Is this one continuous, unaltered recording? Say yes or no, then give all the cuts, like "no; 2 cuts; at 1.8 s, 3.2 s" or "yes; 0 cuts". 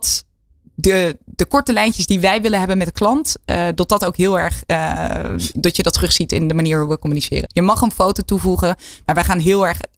no; 1 cut; at 7.4 s